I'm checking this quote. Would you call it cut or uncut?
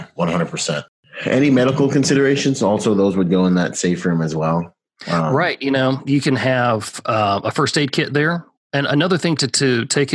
uncut